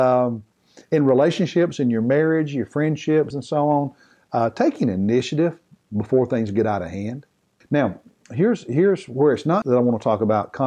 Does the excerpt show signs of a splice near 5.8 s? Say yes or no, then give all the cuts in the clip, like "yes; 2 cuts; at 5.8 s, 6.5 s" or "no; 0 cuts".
no; 3 cuts; at 3.3 s, 7.6 s, 9.6 s